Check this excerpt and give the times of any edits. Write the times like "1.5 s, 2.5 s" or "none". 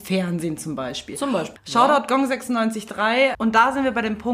1.6 s, 3.3 s